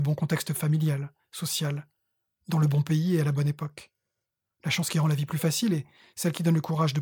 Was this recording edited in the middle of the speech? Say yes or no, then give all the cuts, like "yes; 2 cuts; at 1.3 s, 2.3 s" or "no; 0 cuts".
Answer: no; 0 cuts